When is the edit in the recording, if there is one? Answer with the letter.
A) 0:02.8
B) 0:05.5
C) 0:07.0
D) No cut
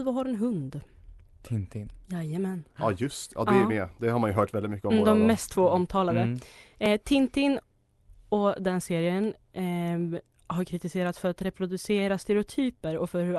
D